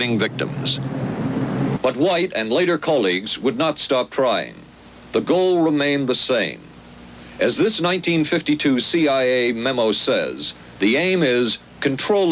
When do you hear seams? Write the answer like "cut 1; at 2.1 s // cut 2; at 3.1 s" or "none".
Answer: cut 1; at 1.8 s